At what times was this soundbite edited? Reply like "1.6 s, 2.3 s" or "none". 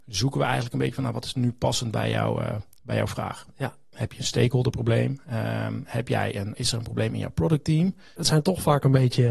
3.9 s, 6.5 s, 8.2 s

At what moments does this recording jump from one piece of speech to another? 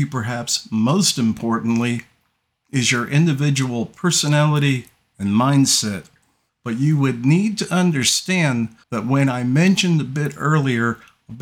6.5 s, 8.8 s

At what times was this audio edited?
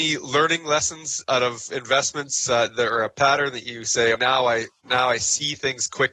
4.1 s

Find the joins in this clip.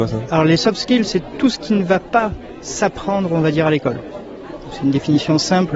none

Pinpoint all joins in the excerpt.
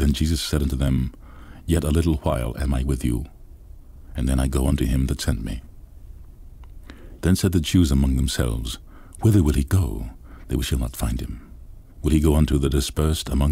7.2 s

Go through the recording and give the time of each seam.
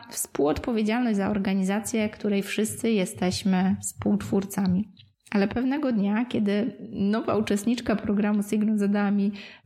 5.1 s

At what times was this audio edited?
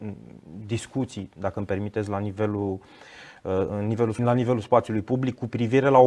4.2 s

